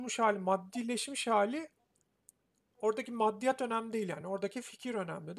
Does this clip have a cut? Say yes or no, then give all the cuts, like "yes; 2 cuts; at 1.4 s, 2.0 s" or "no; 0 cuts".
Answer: no; 0 cuts